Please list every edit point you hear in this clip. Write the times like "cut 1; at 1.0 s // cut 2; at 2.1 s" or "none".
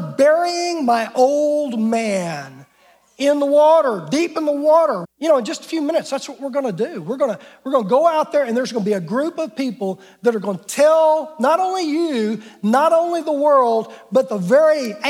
cut 1; at 5.0 s